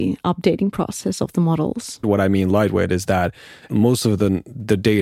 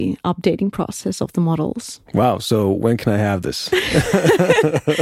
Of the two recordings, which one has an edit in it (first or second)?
first